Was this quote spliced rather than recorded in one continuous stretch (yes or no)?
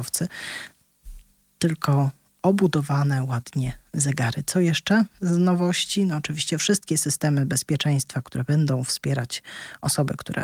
no